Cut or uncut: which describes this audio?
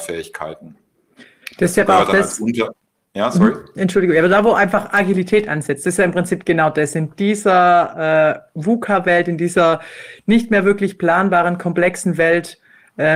uncut